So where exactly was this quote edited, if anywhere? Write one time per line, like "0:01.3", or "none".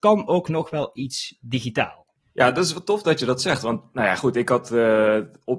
none